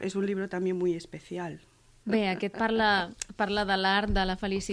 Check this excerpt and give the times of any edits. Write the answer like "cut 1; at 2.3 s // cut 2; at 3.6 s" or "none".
cut 1; at 2.0 s

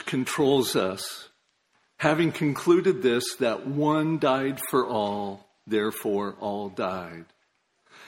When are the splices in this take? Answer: none

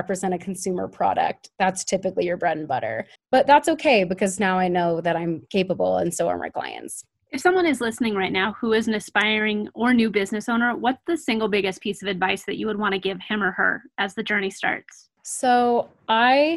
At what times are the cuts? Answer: cut 1; at 3.2 s

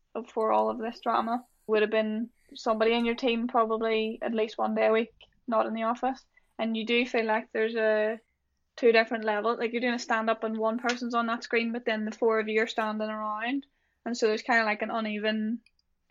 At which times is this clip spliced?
cut 1; at 1.7 s

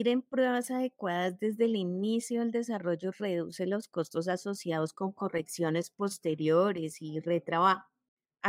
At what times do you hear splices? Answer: none

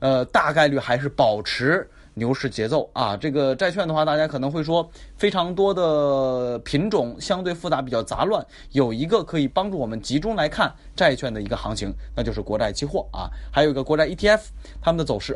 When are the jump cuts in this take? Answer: none

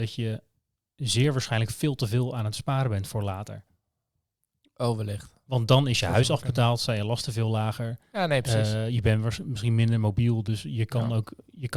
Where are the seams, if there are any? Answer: none

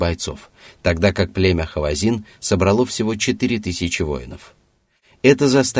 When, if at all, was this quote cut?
none

